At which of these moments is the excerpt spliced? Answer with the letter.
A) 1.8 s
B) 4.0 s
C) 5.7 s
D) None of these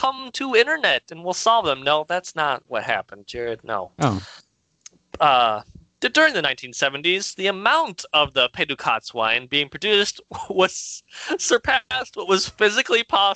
D